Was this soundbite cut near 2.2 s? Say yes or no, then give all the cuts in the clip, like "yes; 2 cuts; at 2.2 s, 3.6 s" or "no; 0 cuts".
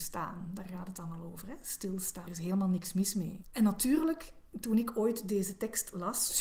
yes; 1 cut; at 2.2 s